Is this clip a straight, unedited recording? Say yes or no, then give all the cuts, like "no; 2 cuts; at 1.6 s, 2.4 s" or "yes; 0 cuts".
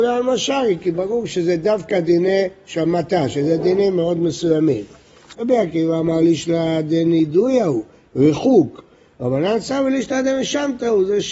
no; 1 cut; at 5.3 s